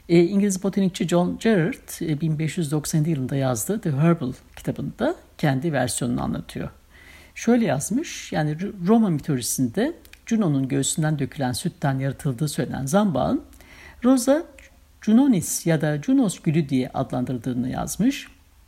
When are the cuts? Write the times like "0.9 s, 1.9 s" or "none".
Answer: none